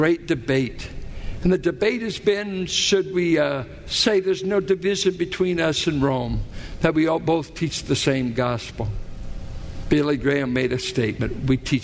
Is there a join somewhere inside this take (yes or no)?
no